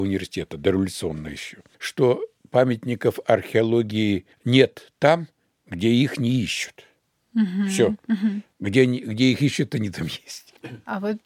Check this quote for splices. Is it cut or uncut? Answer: uncut